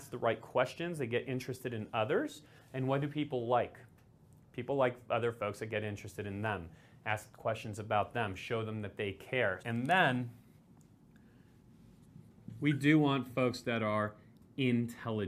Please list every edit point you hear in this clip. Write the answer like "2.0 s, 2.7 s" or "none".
9.6 s